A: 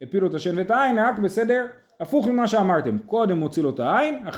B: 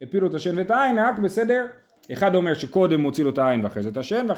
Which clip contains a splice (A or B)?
B